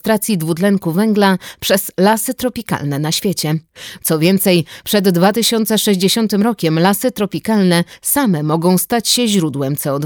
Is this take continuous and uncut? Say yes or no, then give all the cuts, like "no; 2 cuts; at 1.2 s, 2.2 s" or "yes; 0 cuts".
no; 1 cut; at 4.0 s